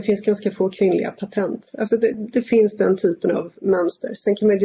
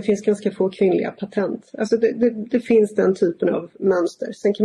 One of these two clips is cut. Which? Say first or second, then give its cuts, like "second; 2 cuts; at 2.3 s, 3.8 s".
first; 1 cut; at 2.1 s